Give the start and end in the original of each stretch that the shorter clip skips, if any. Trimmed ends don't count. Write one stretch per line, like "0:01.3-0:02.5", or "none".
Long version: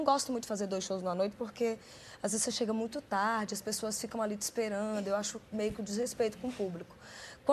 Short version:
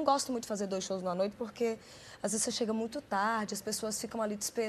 none